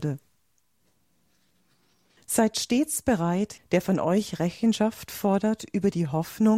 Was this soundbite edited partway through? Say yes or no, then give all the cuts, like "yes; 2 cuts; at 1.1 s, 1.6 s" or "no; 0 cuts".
yes; 2 cuts; at 2.2 s, 3.6 s